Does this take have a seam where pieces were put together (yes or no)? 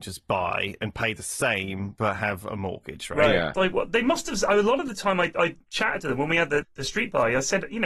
yes